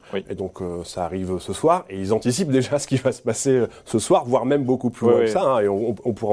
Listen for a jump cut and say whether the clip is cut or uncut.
uncut